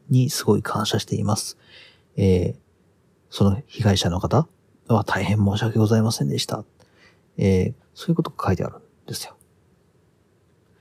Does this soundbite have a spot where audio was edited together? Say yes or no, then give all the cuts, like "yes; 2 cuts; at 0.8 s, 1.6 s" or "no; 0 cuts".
yes; 1 cut; at 7.8 s